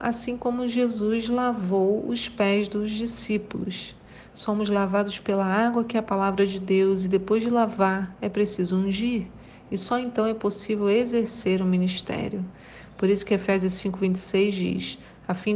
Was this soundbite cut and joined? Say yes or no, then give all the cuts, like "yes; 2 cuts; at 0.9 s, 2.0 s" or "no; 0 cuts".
no; 0 cuts